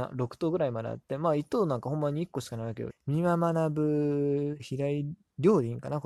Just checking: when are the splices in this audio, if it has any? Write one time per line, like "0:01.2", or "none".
0:02.9
0:04.6